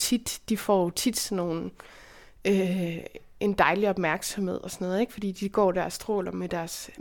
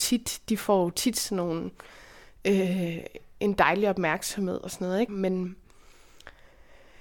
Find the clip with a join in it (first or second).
second